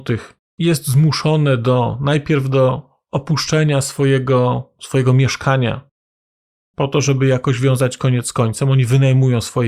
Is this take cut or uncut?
cut